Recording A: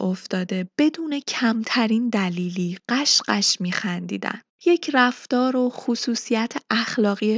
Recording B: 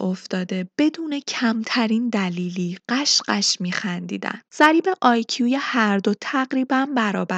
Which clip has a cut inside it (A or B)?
B